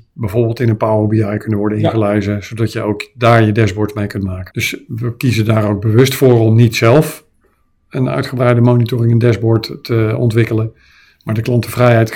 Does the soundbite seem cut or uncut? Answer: cut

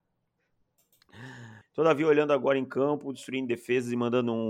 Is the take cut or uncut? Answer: cut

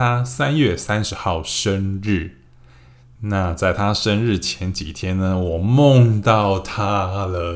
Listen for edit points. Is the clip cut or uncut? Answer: uncut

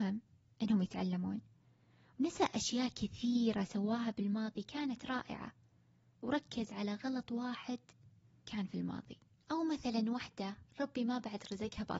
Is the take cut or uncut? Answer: uncut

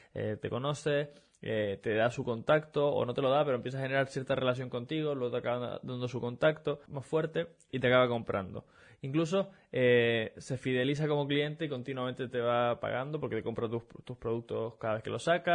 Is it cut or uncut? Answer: cut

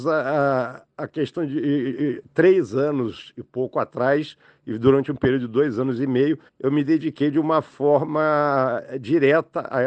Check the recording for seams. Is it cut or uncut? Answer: cut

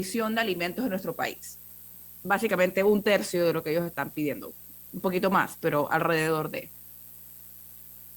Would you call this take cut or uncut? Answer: cut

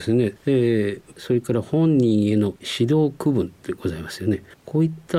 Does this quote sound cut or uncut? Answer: cut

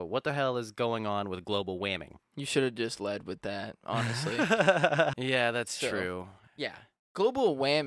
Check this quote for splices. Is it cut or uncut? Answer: cut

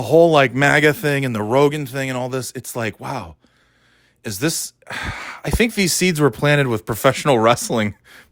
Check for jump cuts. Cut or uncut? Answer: uncut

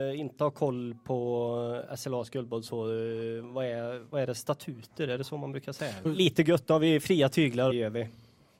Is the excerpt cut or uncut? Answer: cut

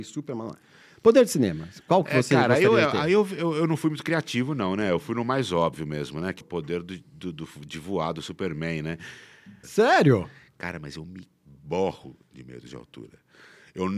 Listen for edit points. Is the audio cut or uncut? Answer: cut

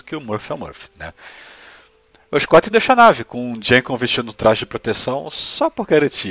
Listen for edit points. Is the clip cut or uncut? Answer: cut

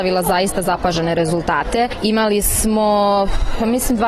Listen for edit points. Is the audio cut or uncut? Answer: uncut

